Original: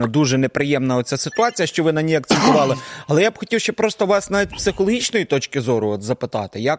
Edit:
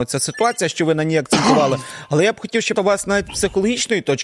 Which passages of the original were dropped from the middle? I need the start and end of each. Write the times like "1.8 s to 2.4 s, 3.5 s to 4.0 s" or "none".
3.7 s to 4.0 s